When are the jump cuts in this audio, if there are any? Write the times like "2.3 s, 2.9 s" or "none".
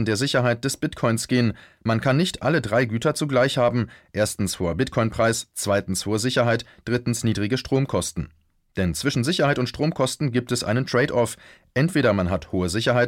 none

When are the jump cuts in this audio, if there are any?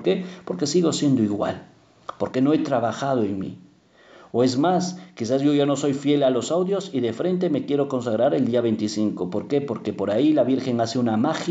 none

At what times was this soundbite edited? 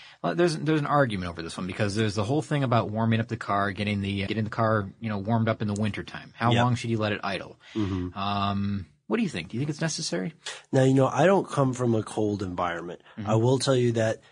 4.3 s

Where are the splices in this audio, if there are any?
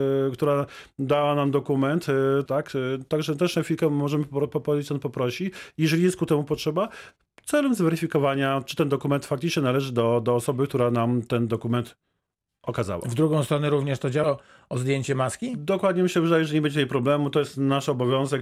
2.5 s, 14.2 s

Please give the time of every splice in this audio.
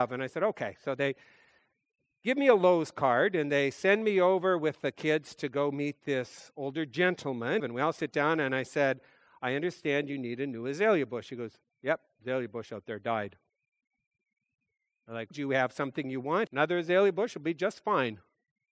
7.6 s, 15.3 s, 16.5 s

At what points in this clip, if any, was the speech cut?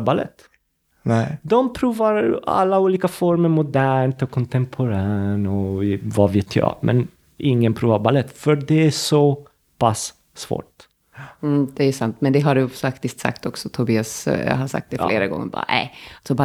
none

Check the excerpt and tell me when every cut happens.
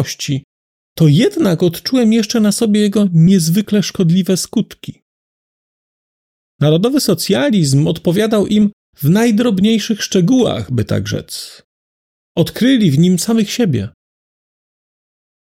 6.5 s

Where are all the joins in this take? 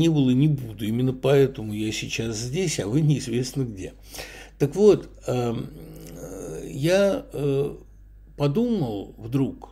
none

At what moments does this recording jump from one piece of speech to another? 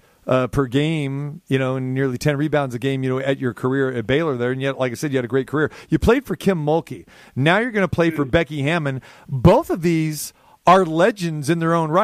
none

